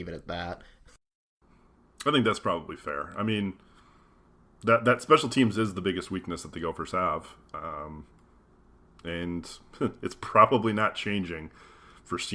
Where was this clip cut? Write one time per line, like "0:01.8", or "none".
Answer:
none